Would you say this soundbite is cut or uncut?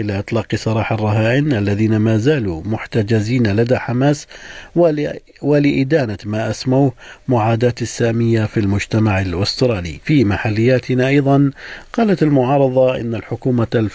cut